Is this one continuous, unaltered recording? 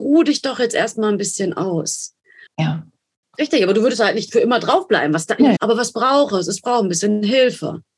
no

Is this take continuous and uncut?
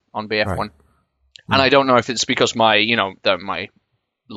yes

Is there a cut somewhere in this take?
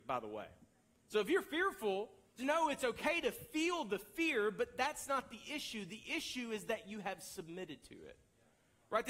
yes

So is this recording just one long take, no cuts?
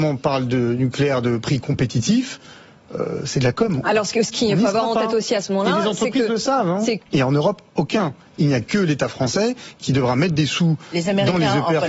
no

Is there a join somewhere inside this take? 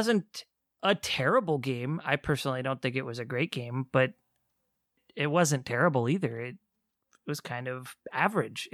no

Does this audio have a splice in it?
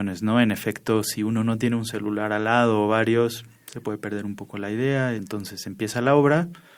yes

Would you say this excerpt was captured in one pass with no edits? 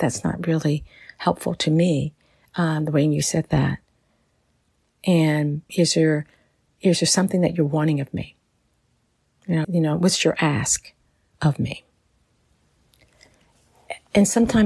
no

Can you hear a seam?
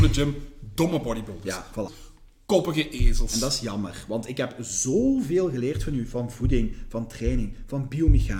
yes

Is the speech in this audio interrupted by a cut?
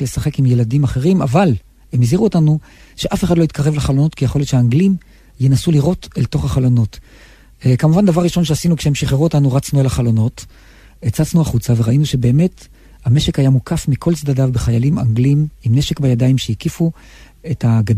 no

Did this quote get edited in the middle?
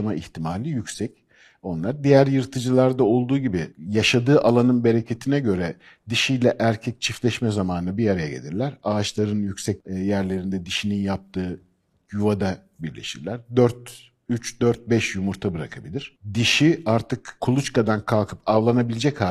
no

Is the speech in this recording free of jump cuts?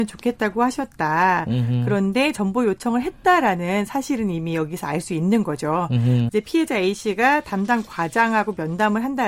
no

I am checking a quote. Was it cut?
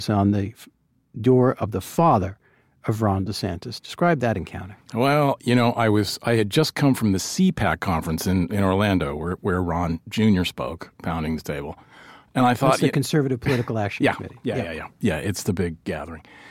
no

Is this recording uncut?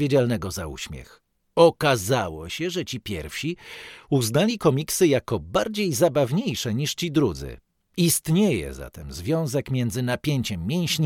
yes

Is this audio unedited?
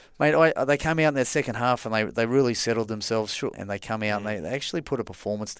no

